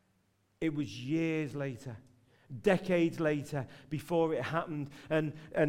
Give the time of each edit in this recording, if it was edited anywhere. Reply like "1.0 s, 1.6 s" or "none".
none